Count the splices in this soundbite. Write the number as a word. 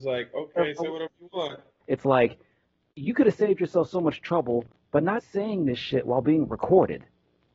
two